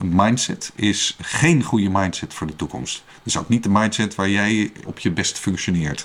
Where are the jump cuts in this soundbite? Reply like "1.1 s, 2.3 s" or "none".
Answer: 4.8 s